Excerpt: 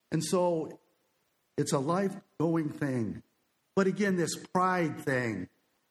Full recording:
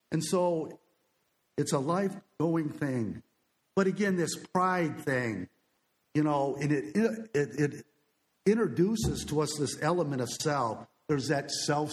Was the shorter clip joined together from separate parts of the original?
no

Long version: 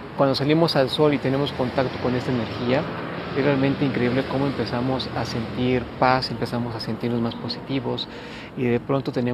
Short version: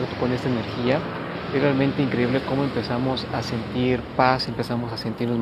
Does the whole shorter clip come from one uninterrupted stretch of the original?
yes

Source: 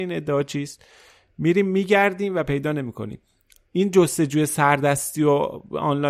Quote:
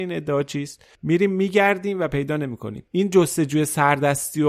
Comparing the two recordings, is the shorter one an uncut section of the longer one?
no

